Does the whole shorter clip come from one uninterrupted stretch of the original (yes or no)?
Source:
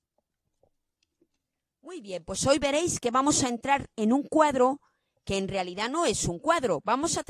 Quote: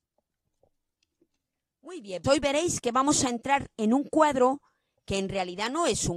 no